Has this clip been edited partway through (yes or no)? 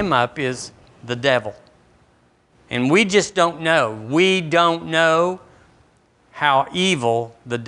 no